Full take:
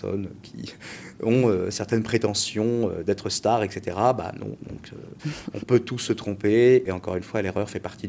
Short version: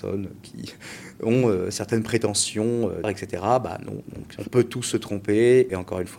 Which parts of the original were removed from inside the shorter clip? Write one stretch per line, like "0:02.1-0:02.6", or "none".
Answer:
0:03.0-0:03.6
0:04.9-0:05.5